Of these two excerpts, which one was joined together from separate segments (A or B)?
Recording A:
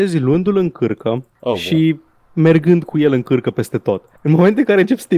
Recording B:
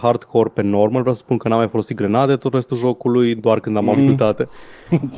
B